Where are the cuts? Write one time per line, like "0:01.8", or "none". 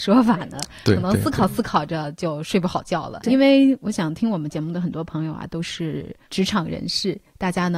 0:03.3